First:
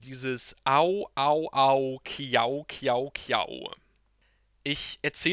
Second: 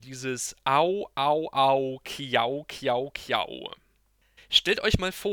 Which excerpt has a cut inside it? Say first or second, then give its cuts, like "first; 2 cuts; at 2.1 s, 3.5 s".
second; 1 cut; at 4.4 s